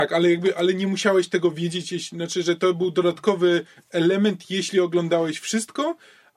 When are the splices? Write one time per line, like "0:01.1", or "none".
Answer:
none